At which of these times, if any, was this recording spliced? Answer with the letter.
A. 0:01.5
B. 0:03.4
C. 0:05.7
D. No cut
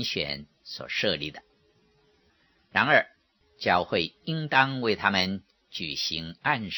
B